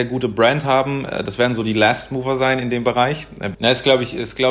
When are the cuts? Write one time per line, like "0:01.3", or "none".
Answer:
0:03.5

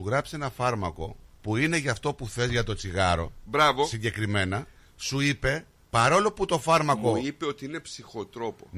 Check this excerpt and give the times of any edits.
none

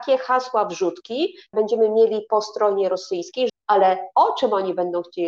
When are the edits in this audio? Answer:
0:01.5
0:03.5

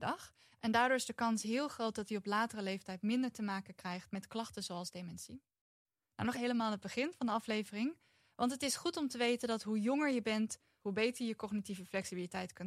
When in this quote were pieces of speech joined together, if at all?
0:06.3
0:10.8

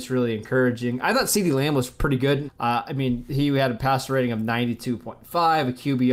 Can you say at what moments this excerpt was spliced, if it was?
0:02.5

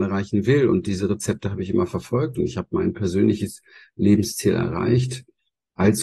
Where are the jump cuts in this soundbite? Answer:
none

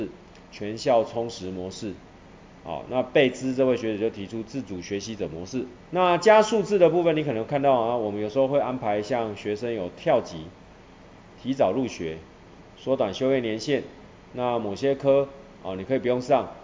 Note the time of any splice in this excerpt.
0:05.8

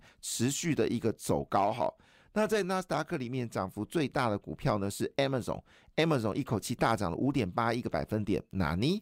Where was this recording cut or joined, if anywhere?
none

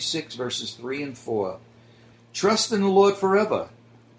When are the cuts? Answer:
0:02.1

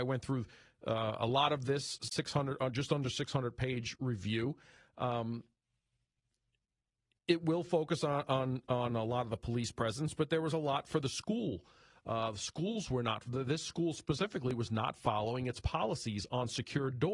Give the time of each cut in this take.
none

